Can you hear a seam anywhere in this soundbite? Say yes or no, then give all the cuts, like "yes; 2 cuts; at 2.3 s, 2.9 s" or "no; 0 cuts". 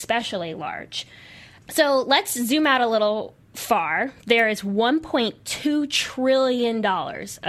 no; 0 cuts